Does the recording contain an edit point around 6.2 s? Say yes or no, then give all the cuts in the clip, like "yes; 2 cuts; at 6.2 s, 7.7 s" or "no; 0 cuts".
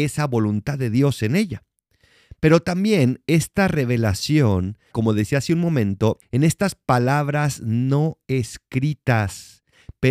yes; 2 cuts; at 4.9 s, 6.2 s